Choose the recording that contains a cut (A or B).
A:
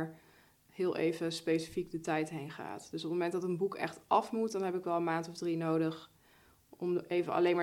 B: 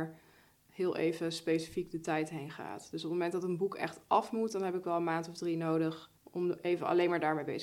B